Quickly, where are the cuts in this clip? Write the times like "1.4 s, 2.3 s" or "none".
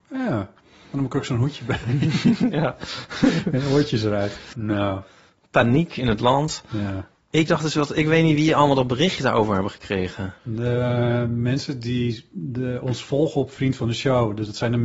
4.5 s, 10.4 s